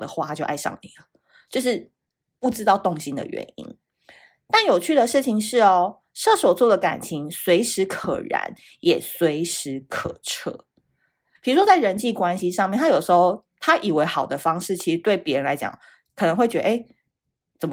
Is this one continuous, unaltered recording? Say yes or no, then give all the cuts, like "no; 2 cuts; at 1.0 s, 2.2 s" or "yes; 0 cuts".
no; 1 cut; at 11.4 s